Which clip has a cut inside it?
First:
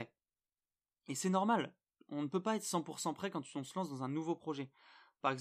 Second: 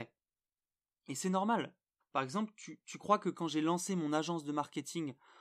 second; 1 cut; at 2.0 s

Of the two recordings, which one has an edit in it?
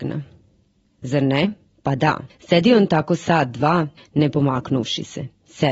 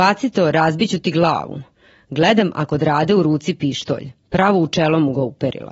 first; 1 cut; at 4.0 s

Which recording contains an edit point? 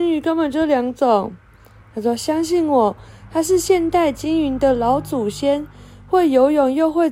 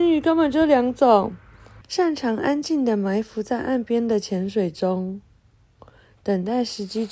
second; 1 cut; at 1.8 s

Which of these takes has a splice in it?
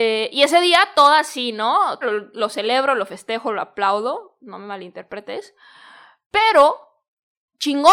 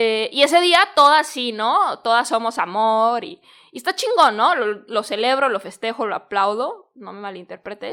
first; 1 cut; at 2.0 s

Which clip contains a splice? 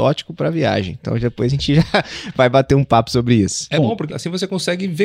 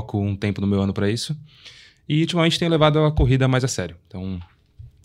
first; 1 cut; at 4.1 s

